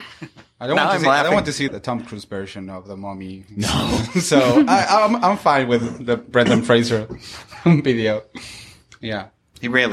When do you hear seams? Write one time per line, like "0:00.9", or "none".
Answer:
0:01.7